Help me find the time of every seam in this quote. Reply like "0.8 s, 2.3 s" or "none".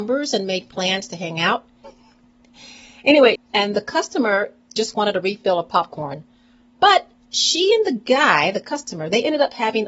1.8 s, 3.4 s